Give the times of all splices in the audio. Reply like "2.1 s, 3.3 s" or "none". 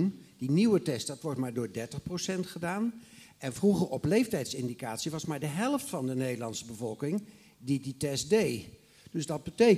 none